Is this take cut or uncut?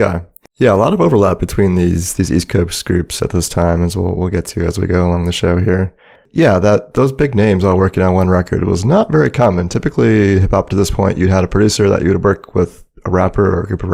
uncut